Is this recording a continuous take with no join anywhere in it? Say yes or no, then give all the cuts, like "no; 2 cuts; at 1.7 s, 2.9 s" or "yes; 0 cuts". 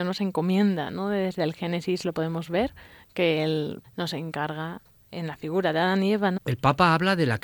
no; 2 cuts; at 3.8 s, 6.4 s